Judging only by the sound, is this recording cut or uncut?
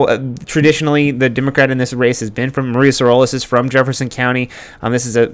uncut